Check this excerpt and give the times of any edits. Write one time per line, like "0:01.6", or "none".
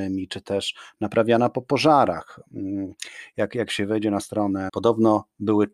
0:04.7